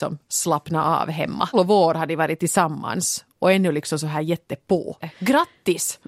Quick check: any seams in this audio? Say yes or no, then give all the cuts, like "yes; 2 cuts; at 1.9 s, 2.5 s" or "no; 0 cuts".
yes; 2 cuts; at 1.5 s, 5.0 s